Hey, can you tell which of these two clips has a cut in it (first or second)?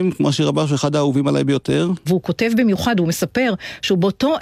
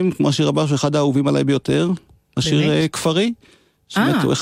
first